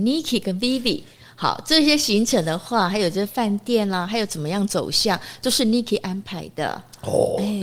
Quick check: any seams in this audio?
no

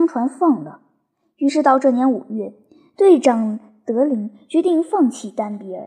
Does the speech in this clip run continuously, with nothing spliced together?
yes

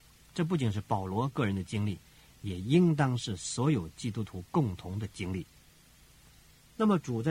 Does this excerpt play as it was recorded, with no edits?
yes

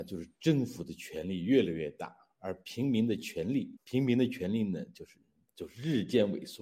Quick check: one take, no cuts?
no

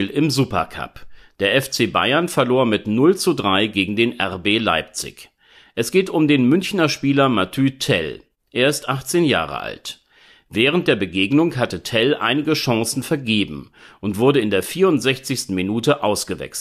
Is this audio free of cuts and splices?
yes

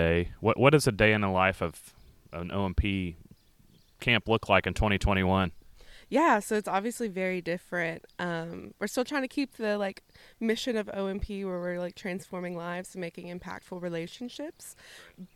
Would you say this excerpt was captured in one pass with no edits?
yes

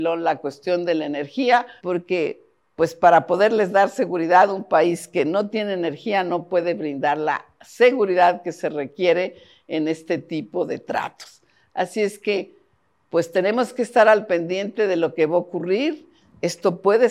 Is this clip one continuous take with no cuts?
no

